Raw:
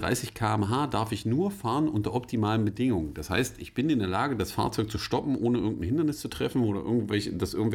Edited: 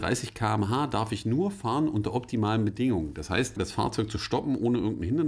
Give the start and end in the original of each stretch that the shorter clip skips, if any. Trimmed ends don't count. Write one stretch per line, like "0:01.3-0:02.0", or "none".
0:03.6-0:04.4